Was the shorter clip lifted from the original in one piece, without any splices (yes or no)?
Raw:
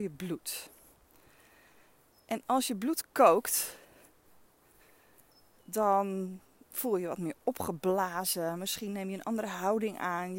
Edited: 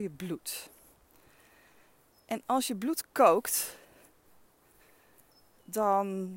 yes